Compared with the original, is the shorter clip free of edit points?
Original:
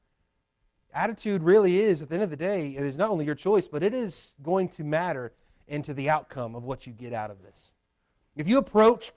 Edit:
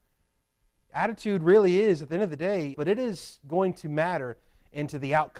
no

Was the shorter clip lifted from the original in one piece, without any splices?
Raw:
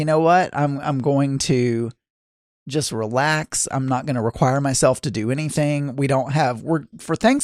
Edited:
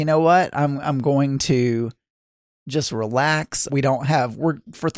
no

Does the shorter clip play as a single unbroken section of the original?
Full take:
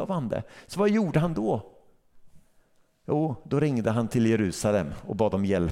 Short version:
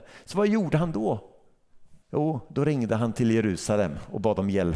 no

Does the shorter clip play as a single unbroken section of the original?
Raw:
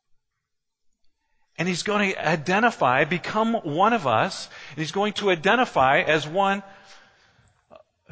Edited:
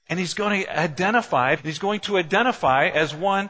no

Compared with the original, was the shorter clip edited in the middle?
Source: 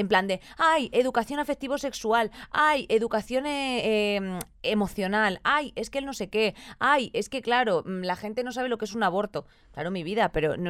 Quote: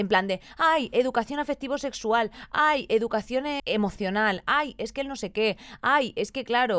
yes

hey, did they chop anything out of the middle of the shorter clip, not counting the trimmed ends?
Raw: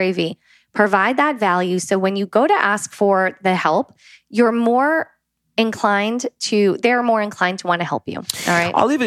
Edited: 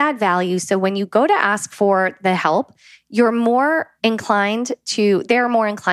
yes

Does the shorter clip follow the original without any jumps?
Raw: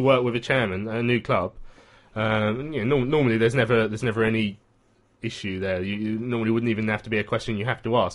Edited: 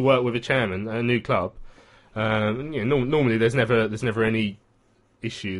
yes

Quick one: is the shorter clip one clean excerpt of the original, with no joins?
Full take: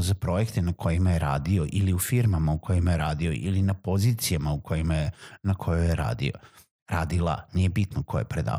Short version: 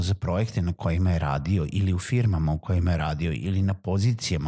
yes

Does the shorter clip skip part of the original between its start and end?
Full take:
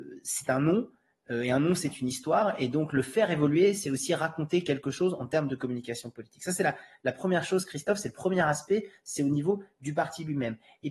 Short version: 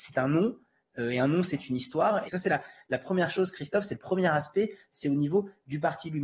yes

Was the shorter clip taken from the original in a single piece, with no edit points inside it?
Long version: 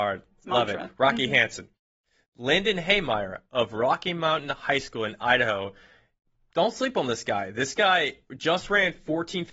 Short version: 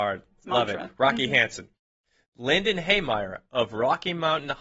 yes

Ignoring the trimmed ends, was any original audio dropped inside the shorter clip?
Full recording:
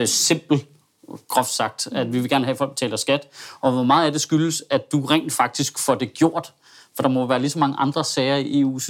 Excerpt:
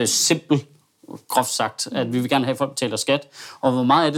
no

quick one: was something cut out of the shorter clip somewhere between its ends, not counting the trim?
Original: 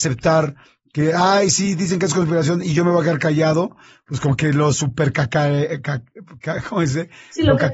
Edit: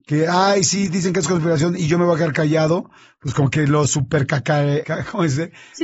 yes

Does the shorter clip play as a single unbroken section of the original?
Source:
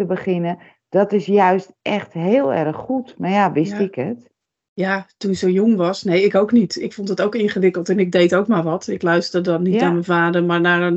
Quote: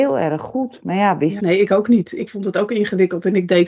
no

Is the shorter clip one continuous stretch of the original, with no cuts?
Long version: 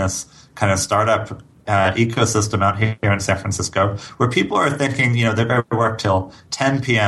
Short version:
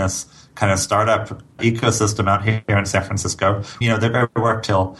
no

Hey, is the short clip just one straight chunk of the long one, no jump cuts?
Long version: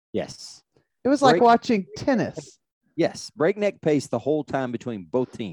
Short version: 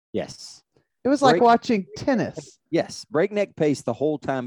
no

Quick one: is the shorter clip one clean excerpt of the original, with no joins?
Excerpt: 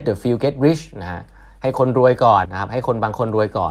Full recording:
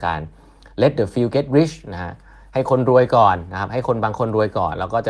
no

